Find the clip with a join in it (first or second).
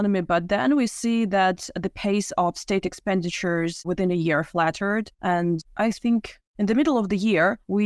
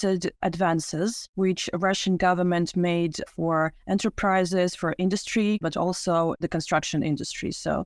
second